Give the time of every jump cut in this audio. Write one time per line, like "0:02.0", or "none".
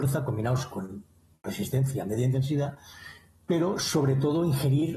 none